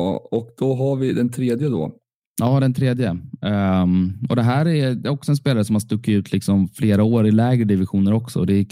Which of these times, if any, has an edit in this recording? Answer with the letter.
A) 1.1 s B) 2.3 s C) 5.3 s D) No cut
D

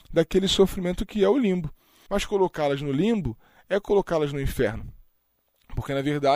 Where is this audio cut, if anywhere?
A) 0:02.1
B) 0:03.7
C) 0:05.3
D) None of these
A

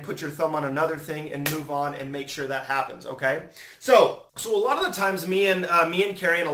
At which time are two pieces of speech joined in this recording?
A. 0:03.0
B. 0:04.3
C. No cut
B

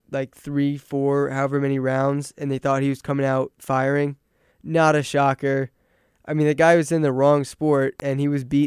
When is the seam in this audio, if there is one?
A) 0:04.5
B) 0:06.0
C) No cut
A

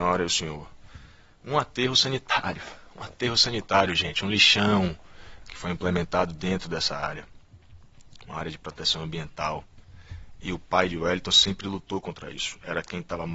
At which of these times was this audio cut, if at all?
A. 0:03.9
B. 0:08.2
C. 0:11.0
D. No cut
D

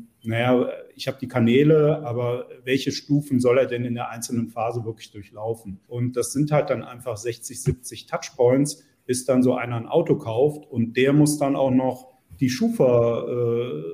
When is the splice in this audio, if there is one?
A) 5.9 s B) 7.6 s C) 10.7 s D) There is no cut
A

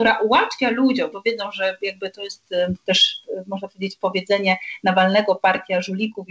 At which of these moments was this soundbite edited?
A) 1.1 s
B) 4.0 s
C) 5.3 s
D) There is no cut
A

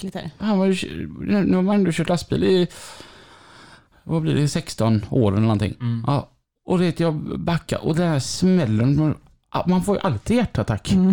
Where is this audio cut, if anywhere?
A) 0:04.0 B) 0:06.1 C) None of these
C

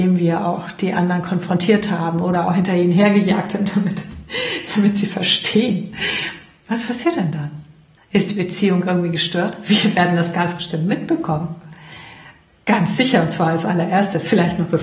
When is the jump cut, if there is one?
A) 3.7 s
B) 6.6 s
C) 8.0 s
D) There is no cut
C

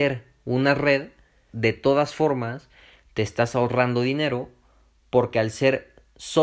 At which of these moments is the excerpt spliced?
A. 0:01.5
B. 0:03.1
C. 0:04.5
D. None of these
A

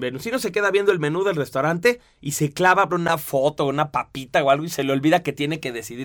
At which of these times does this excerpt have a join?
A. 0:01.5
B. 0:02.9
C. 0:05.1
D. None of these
B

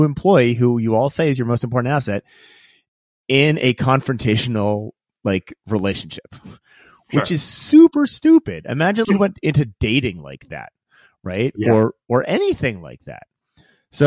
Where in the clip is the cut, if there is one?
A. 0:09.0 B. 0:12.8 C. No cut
A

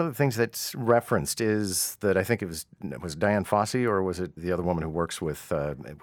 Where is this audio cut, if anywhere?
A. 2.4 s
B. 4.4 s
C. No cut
B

